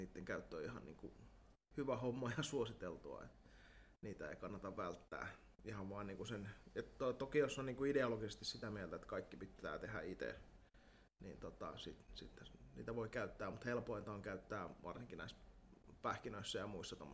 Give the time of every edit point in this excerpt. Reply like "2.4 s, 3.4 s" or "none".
none

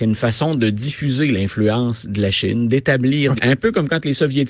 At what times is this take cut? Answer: 3.4 s

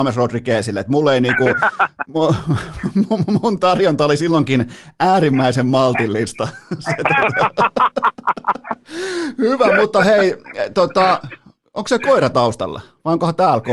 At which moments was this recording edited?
none

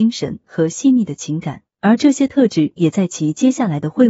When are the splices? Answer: 1.7 s

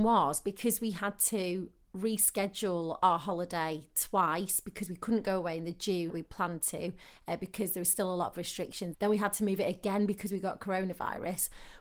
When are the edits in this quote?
6.1 s, 8.9 s

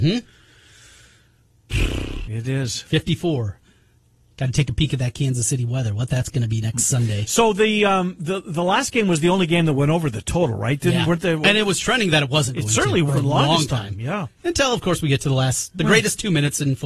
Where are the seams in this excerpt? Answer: 2.2 s, 13.1 s

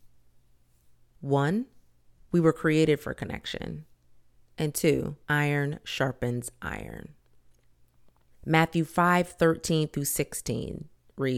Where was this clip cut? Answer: 5.2 s, 8.3 s

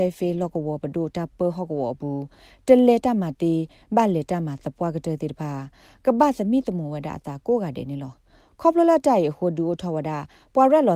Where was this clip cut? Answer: 3.3 s

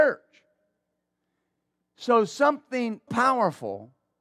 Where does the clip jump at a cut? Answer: 3.1 s

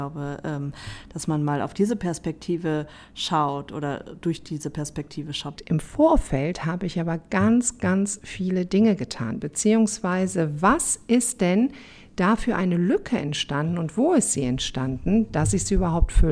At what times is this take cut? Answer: 5.6 s, 9.4 s

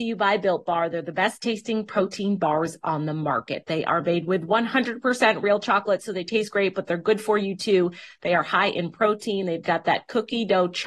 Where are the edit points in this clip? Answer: none

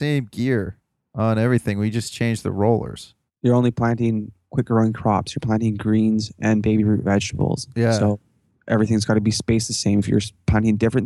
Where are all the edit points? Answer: 3.3 s

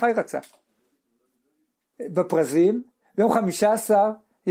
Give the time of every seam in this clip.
1.9 s

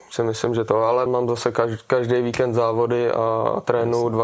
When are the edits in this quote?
1.1 s

